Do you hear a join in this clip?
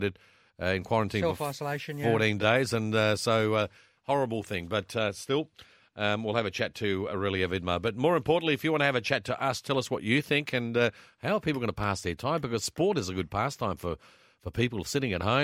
no; 0 cuts

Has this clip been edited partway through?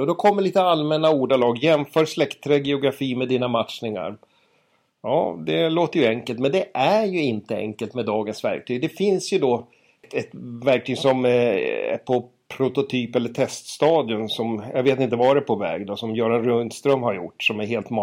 no; 0 cuts

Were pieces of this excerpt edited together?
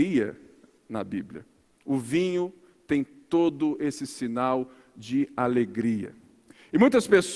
no; 0 cuts

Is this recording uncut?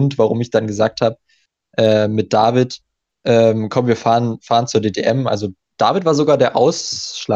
yes; 0 cuts

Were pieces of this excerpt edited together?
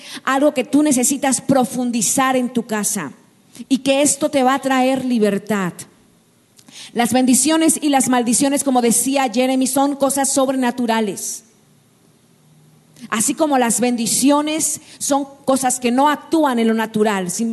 no; 0 cuts

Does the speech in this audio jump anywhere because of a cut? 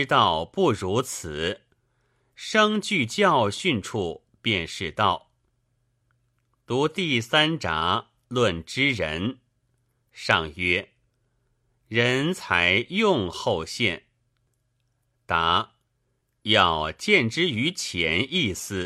no; 0 cuts

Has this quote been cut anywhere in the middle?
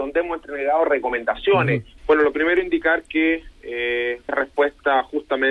yes; 2 cuts; at 2.0 s, 4.3 s

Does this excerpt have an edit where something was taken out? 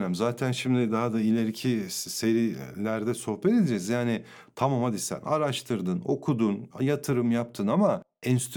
yes; 1 cut; at 6.7 s

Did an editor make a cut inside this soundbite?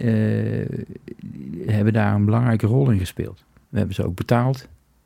yes; 1 cut; at 3.7 s

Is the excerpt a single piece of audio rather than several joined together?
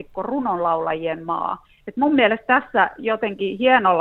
yes; 0 cuts

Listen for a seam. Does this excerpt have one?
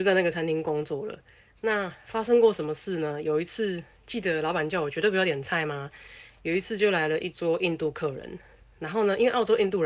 no; 0 cuts

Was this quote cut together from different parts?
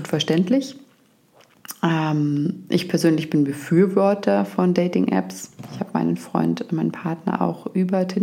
no; 0 cuts

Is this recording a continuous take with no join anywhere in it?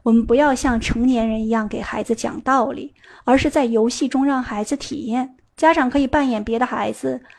no; 1 cut; at 5.5 s

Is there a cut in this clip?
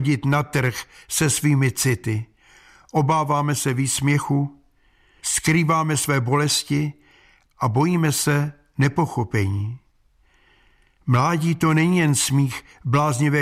no; 0 cuts

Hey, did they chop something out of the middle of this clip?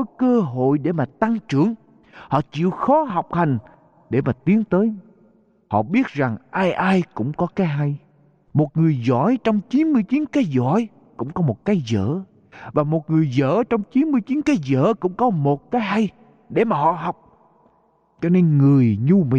no; 0 cuts

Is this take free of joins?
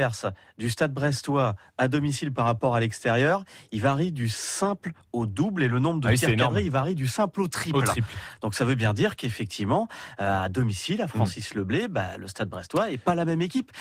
yes; 0 cuts

